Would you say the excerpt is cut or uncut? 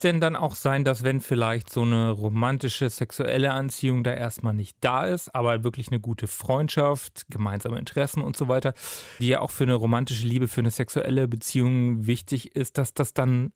cut